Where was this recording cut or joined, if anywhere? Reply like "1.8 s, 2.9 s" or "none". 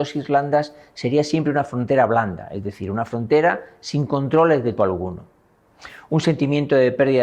4.8 s